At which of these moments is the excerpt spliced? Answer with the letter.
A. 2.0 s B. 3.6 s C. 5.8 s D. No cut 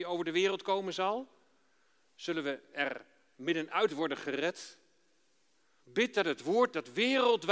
C